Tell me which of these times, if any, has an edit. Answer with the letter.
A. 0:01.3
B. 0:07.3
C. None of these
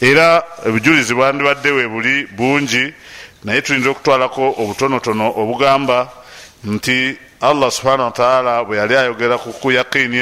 C